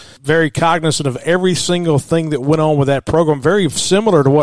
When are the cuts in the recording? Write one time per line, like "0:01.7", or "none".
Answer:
none